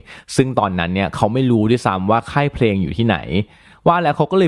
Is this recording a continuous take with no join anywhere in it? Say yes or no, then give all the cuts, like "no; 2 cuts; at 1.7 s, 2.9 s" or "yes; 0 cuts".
yes; 0 cuts